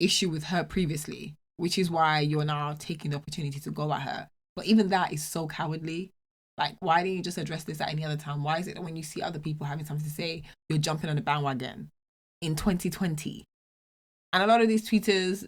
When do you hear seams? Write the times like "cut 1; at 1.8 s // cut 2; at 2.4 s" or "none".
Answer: none